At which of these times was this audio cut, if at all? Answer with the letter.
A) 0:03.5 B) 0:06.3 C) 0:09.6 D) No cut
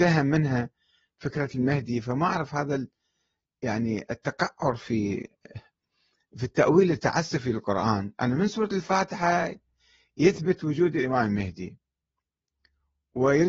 D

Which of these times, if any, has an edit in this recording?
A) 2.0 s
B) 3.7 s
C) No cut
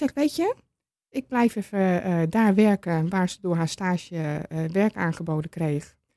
C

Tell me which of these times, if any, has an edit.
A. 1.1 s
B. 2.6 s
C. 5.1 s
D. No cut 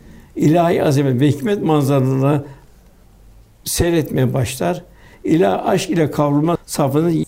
C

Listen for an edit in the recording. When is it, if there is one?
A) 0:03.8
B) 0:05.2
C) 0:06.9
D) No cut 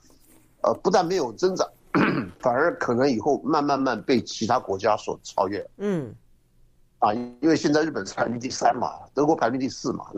A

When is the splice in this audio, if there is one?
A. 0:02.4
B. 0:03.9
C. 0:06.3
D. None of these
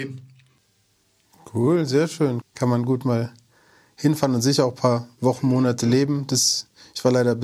A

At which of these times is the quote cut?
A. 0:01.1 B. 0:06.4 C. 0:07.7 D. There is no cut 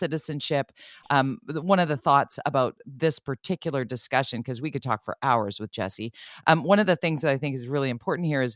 D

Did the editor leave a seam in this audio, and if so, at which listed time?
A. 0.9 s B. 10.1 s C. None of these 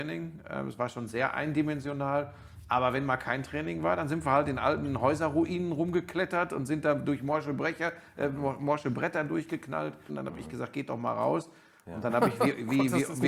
B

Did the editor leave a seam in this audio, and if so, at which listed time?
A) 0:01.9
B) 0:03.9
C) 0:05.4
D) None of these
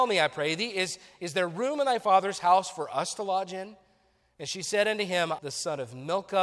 C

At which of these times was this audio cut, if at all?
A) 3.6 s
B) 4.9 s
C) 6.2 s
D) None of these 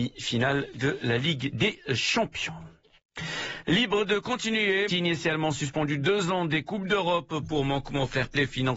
B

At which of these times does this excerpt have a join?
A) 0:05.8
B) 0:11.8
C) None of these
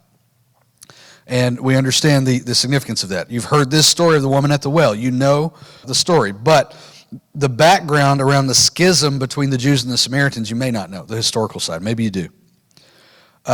A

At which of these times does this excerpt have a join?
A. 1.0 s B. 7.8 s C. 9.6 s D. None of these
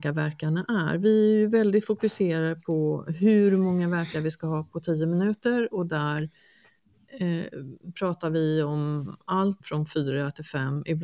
C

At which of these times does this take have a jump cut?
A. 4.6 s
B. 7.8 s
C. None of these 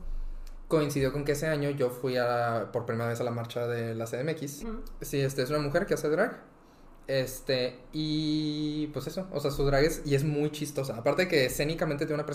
A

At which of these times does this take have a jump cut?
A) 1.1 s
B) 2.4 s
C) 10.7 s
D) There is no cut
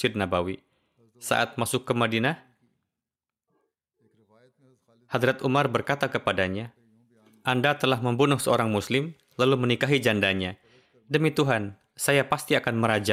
D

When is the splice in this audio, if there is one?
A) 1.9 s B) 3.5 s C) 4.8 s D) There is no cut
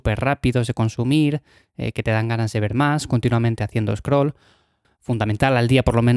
C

